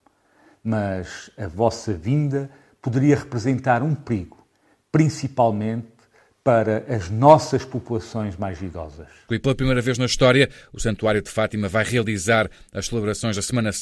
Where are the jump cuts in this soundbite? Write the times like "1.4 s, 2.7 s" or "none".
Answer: 9.3 s